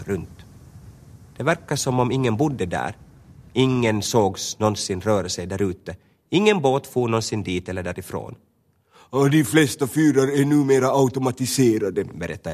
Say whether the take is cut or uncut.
uncut